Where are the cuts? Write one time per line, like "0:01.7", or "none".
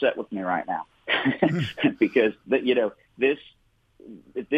0:02.4